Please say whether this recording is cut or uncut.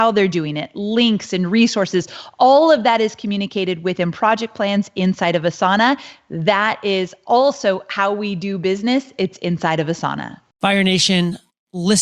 uncut